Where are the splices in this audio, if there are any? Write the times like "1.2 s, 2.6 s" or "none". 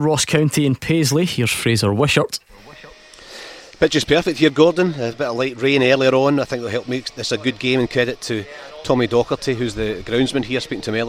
none